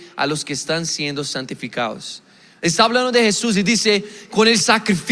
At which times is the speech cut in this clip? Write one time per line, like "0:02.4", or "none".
none